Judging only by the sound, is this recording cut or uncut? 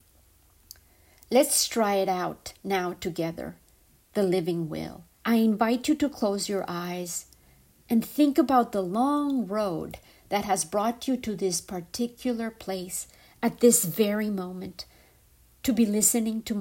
cut